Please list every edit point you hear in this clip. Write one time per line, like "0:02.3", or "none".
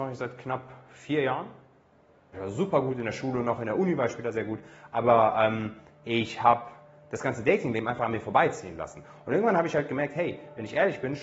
0:02.3